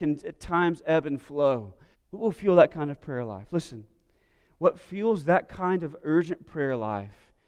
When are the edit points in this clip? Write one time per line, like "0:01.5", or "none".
0:01.9